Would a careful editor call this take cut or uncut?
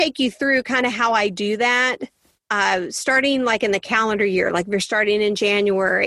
uncut